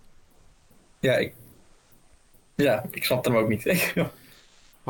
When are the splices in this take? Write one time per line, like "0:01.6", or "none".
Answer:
none